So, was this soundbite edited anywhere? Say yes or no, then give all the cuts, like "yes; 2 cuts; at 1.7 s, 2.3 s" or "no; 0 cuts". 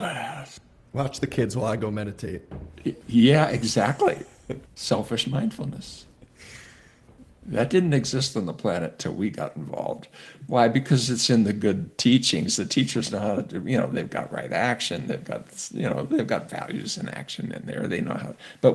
yes; 1 cut; at 4.7 s